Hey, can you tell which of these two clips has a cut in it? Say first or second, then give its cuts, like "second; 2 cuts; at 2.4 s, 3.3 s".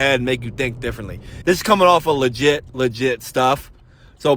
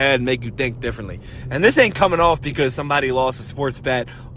first; 1 cut; at 1.4 s